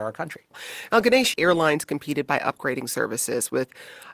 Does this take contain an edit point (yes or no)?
yes